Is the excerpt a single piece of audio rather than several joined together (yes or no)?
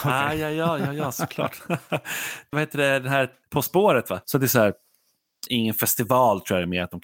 no